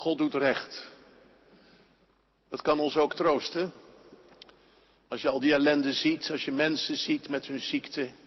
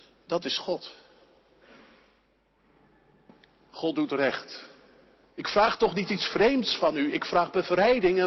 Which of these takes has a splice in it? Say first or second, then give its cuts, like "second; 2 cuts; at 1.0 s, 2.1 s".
second; 1 cut; at 5.2 s